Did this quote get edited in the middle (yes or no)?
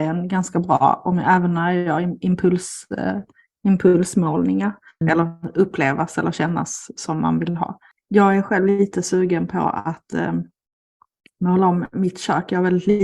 yes